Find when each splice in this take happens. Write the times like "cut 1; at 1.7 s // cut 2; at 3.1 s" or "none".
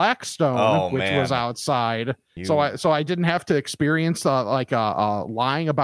cut 1; at 2.4 s